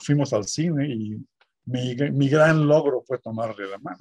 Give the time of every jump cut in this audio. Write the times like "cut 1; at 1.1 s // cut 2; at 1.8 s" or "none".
none